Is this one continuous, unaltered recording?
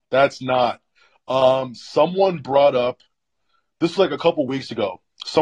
yes; 0 cuts

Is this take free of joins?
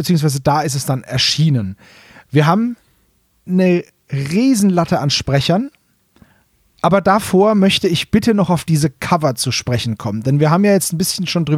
yes; 0 cuts

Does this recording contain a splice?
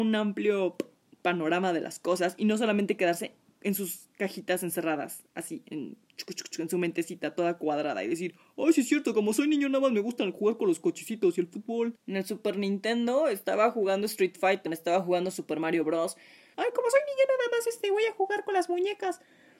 yes; 3 cuts; at 12.0 s, 14.7 s, 16.5 s

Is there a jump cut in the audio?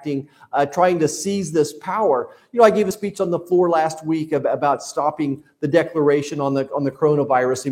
no; 0 cuts

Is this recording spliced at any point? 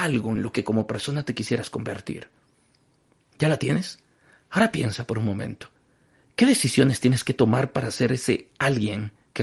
no; 0 cuts

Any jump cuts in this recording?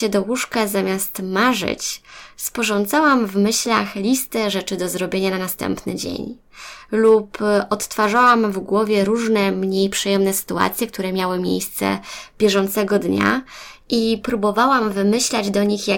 no; 0 cuts

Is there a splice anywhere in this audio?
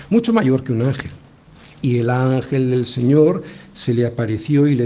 yes; 1 cut; at 1.7 s

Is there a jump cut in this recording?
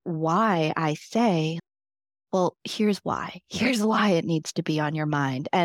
no; 0 cuts

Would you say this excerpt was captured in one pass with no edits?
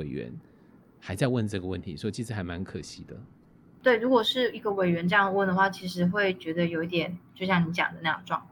yes; 0 cuts

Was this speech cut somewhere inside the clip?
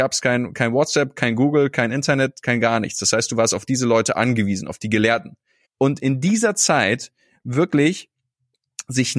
yes; 1 cut; at 5.6 s

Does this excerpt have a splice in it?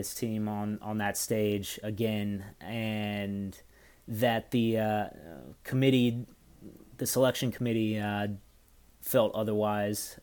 no; 0 cuts

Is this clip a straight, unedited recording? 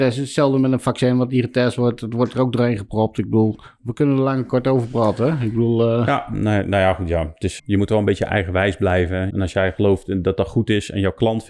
no; 2 cuts; at 7.6 s, 9.3 s

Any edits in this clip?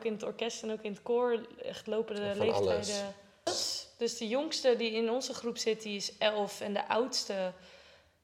yes; 1 cut; at 3.5 s

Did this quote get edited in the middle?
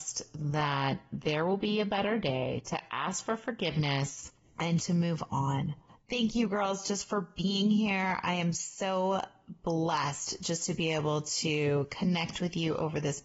no; 0 cuts

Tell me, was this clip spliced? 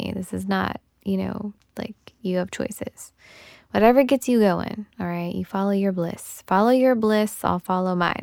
yes; 1 cut; at 1.7 s

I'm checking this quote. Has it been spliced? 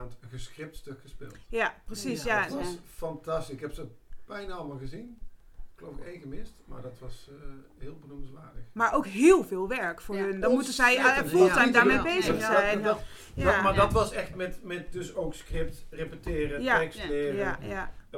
no; 0 cuts

